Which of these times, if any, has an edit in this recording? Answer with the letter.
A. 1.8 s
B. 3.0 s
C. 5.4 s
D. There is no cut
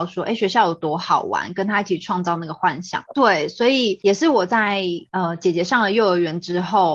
B